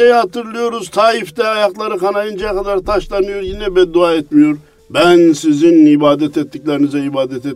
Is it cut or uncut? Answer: cut